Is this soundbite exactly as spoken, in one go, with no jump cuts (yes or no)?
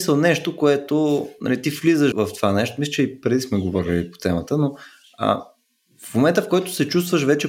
no